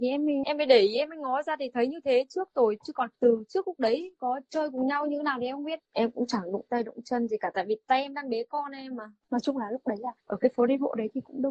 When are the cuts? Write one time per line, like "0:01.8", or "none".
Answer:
0:03.1
0:05.8